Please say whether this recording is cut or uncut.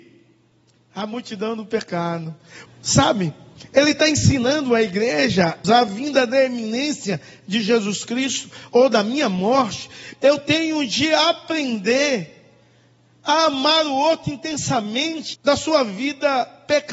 cut